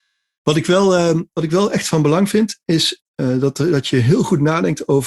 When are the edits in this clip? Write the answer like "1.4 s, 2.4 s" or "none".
none